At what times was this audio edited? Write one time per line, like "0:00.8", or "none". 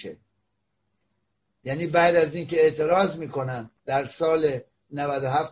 0:03.8